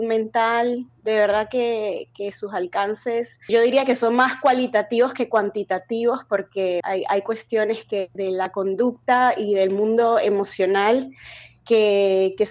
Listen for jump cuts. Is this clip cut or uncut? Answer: cut